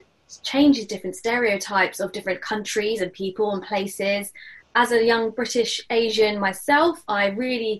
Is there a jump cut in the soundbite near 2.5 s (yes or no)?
no